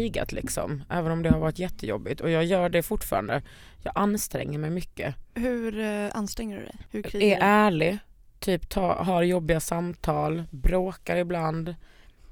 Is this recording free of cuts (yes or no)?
yes